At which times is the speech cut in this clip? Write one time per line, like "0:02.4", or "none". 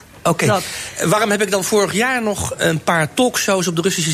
0:02.5